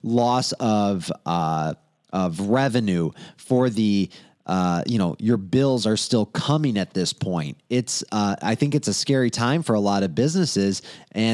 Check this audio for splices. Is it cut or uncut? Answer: uncut